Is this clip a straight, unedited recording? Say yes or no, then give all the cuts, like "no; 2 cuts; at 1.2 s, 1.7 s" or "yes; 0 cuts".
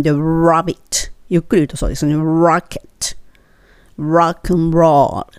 yes; 0 cuts